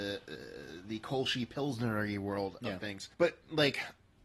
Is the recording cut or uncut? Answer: cut